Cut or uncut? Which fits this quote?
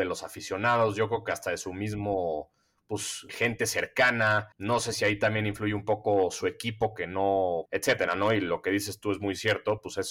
cut